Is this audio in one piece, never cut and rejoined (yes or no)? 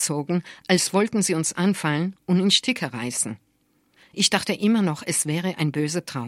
no